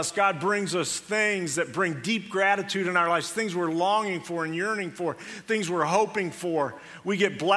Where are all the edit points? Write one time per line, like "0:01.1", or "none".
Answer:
none